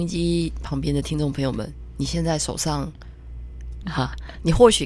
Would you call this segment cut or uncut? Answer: cut